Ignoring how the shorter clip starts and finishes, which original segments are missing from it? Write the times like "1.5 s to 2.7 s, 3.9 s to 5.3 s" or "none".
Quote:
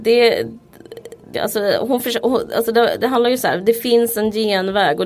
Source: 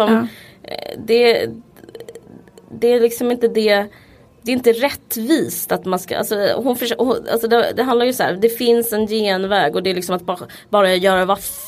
2.4 s to 6.1 s